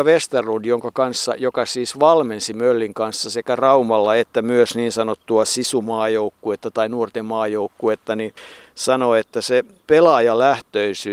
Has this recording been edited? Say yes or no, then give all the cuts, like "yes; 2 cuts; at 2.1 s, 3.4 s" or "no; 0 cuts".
no; 0 cuts